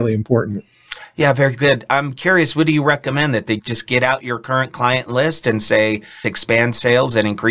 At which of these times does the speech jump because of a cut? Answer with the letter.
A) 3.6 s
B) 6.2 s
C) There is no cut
B